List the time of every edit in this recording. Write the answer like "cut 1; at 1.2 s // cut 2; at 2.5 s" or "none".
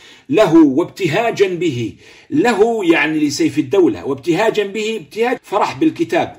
cut 1; at 5.4 s